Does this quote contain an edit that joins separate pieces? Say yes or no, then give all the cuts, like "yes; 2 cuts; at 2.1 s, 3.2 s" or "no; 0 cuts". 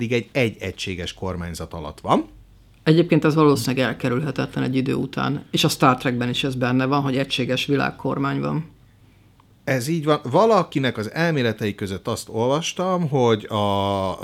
no; 0 cuts